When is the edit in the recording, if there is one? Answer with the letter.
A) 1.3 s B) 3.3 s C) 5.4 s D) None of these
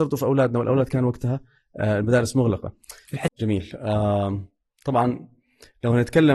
B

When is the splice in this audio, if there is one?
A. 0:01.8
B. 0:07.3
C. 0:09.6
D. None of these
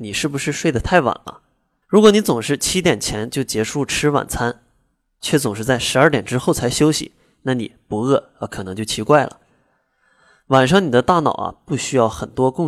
A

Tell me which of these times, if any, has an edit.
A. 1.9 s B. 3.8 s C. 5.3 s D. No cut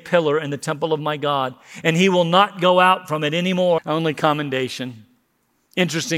B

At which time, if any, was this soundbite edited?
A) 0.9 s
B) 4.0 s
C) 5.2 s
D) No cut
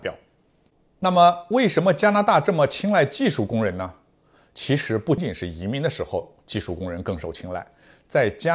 C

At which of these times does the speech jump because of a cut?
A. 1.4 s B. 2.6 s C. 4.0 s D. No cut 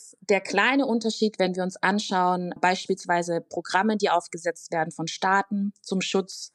B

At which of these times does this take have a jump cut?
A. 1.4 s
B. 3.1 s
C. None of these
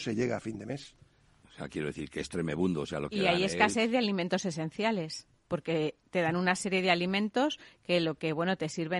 A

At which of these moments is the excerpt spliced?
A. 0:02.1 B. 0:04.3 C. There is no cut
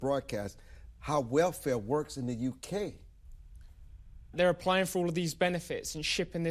B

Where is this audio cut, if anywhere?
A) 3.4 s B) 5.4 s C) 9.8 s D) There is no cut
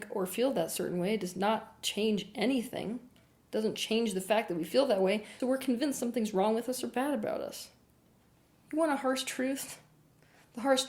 B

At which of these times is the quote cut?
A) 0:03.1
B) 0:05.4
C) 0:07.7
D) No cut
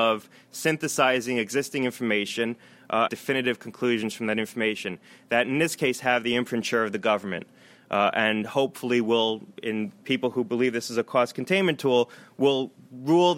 A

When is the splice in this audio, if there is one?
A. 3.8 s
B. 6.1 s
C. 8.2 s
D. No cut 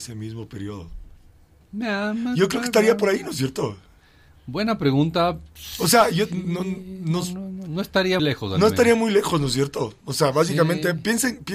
C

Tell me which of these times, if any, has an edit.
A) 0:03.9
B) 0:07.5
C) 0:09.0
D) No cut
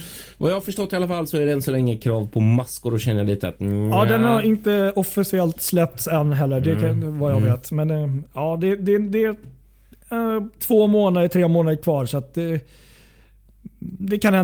D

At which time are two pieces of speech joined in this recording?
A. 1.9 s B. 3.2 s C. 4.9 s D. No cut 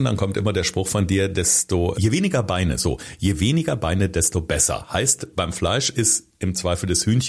A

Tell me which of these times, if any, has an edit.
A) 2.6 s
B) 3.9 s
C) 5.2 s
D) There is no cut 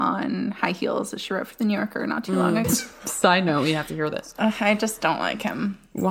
A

